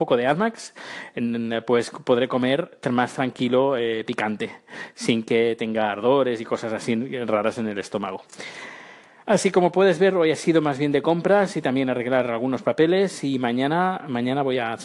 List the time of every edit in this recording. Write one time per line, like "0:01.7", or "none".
none